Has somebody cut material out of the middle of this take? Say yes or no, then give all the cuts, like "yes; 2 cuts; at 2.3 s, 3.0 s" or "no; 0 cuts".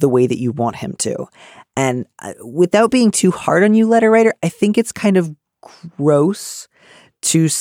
no; 0 cuts